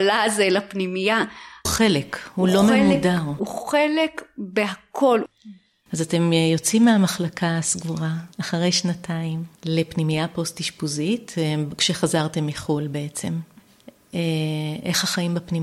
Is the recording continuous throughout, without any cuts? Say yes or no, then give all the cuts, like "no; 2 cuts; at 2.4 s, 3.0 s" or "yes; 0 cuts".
no; 3 cuts; at 1.7 s, 8.3 s, 9.6 s